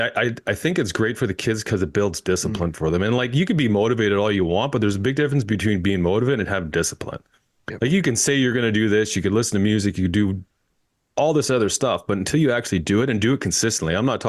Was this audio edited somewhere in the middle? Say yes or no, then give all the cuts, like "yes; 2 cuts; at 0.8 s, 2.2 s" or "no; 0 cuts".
no; 0 cuts